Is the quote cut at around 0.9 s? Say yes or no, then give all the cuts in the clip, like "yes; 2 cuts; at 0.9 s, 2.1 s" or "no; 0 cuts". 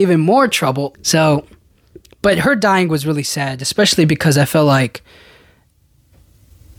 yes; 1 cut; at 0.9 s